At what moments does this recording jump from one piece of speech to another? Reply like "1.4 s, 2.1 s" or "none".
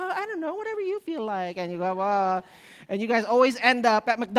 none